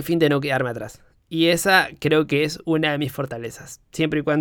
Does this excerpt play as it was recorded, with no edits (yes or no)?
yes